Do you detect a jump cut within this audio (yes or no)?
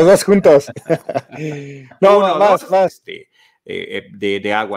yes